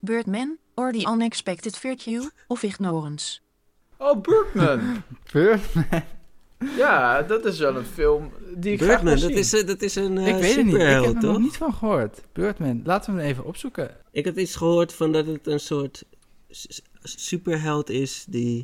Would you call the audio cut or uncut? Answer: uncut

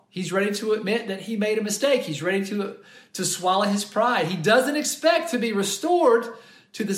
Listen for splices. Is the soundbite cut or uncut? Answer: uncut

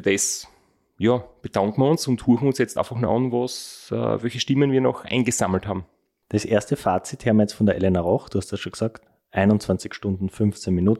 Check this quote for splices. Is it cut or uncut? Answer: uncut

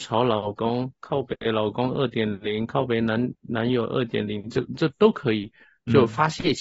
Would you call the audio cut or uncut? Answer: uncut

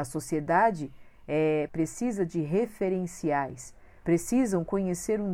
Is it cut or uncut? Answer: cut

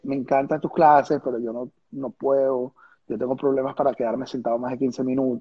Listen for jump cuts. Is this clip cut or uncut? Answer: uncut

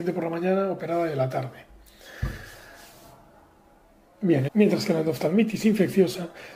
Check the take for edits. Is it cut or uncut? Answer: cut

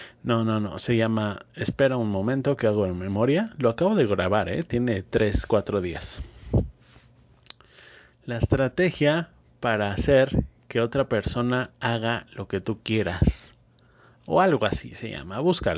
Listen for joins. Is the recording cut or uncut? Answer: uncut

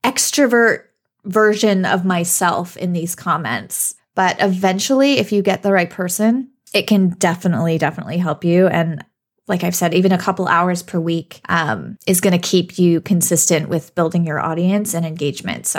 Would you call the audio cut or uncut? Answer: cut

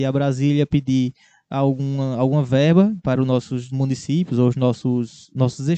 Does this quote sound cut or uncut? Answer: uncut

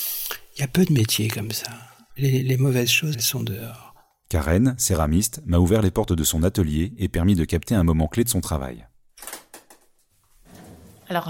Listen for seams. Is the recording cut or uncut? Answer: cut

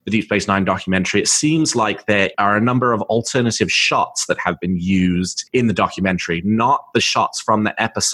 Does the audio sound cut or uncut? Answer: uncut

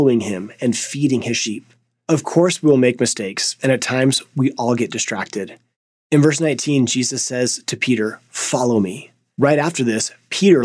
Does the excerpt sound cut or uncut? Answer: uncut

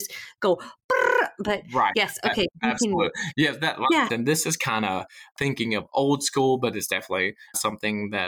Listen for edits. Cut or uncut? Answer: cut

